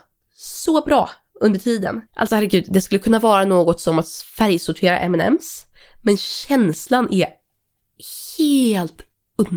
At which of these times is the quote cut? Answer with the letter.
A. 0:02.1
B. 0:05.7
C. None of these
A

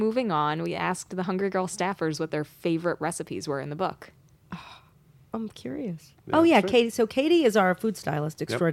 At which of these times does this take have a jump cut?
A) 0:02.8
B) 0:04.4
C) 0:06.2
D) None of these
C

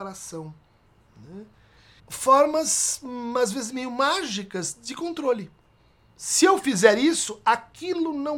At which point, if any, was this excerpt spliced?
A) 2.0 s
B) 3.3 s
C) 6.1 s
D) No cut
A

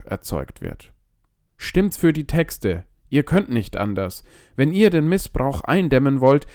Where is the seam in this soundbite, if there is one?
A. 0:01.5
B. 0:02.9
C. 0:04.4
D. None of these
A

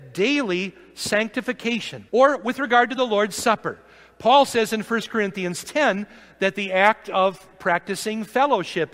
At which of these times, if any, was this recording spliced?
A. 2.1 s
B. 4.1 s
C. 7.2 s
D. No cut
A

